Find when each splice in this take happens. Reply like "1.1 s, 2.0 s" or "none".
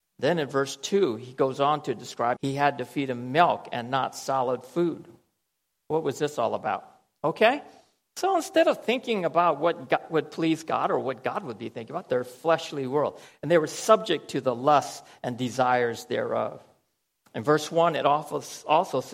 2.4 s, 7.2 s, 12.1 s